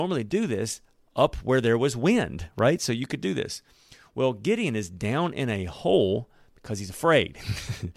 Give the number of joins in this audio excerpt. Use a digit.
0